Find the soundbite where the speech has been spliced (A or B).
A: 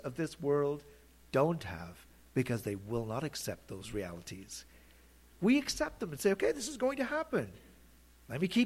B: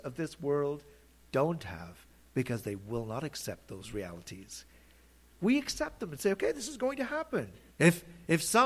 B